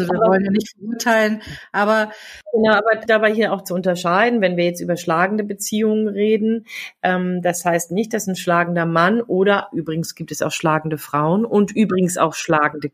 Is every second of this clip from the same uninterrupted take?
no; 1 cut; at 3.1 s

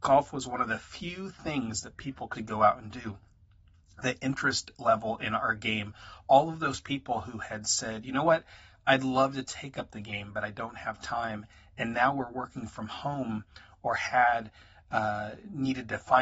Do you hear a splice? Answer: yes; 1 cut; at 2.3 s

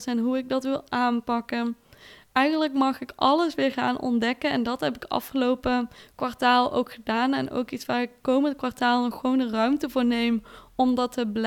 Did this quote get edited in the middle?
no; 0 cuts

